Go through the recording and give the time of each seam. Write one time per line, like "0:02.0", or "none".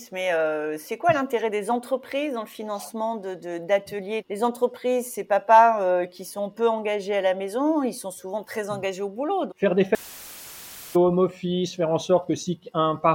0:04.2
0:09.5